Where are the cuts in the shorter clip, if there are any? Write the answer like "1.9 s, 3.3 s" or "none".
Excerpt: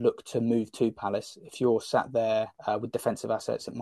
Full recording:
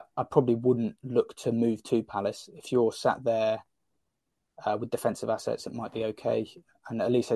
2.6 s

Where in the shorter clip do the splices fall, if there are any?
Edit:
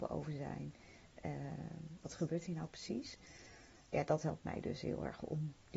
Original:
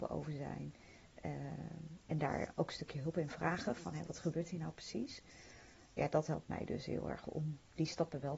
2.0 s

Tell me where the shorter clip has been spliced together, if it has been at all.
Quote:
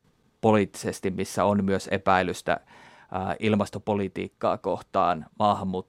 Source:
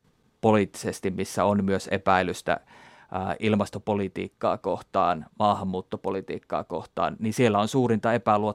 none

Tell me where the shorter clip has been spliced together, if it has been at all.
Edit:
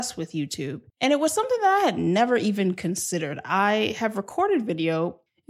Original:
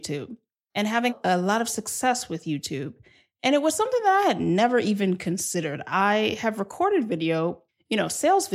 0.9 s

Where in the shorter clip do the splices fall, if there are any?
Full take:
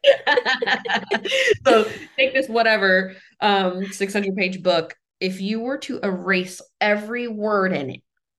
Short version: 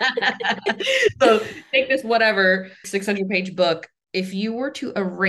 2.8 s

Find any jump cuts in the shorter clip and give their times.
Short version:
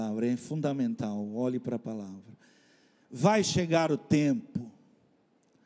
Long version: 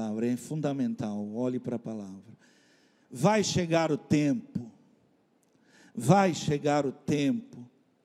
none

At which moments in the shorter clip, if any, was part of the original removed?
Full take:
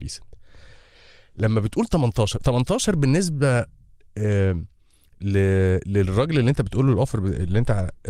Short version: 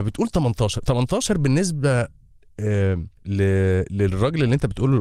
3.2 s

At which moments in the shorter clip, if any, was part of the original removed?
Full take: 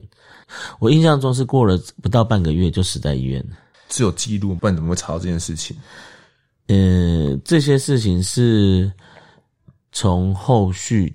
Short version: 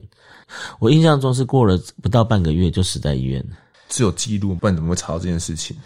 none

